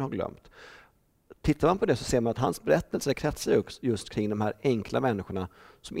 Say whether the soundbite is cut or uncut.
uncut